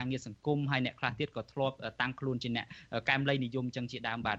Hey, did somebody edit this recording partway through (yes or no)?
no